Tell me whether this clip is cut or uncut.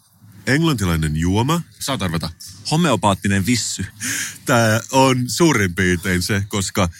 cut